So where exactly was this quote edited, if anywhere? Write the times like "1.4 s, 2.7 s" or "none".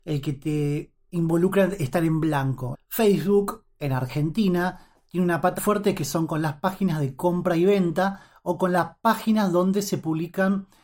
2.7 s, 5.6 s